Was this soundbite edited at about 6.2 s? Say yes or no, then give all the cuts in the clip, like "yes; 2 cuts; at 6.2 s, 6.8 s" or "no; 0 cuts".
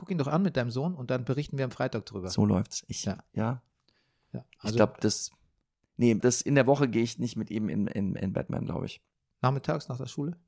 yes; 1 cut; at 6.2 s